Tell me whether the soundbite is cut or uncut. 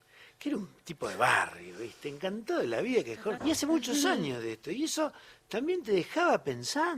cut